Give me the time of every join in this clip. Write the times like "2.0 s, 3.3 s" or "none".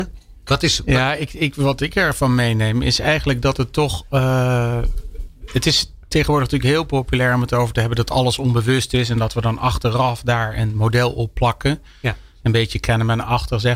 none